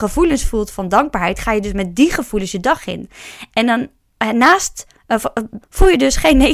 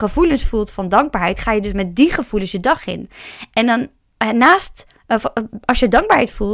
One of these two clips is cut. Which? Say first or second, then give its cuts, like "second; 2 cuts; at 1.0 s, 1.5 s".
first; 1 cut; at 5.6 s